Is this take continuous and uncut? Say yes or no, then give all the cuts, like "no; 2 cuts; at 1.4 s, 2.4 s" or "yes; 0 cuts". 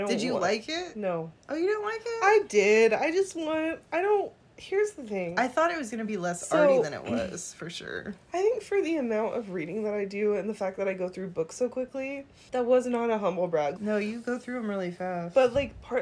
no; 2 cuts; at 1.4 s, 13.8 s